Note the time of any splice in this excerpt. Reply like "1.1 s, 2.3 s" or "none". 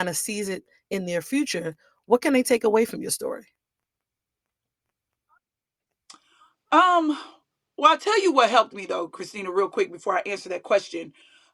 none